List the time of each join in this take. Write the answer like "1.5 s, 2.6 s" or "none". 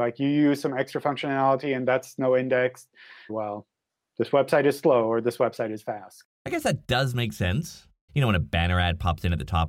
3.3 s, 8.1 s